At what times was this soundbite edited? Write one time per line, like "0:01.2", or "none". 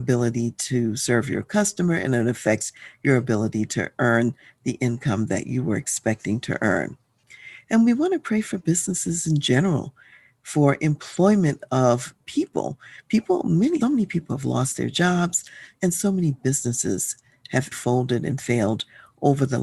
0:13.8
0:15.7
0:17.7